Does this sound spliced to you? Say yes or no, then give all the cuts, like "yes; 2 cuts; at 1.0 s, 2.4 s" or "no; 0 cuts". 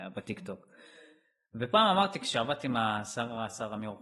no; 0 cuts